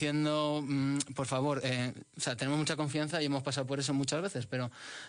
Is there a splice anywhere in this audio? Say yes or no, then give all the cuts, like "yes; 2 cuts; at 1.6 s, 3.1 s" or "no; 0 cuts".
no; 0 cuts